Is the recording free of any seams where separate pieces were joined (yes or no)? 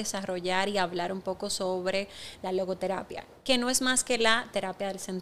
yes